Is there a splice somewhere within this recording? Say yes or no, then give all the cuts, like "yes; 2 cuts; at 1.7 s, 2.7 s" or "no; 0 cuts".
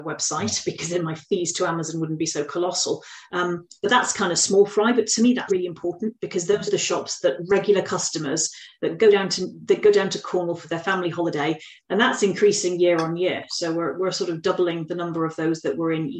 yes; 3 cuts; at 3.3 s, 5.5 s, 11.8 s